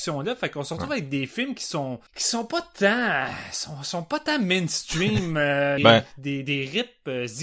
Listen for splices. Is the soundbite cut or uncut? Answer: cut